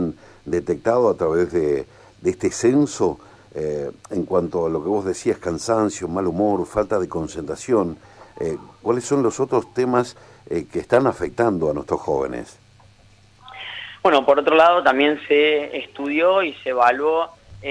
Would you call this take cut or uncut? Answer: uncut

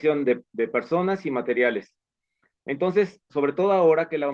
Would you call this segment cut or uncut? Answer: cut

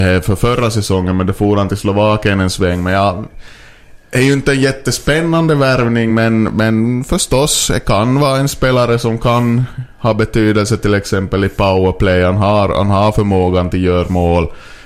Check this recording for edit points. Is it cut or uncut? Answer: uncut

